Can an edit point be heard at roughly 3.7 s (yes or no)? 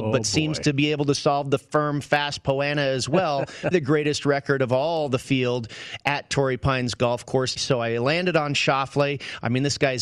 yes